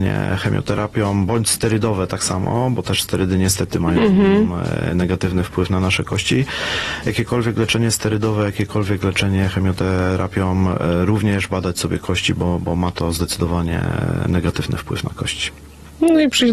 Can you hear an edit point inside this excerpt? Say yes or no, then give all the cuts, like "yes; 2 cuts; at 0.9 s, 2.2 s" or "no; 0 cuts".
no; 0 cuts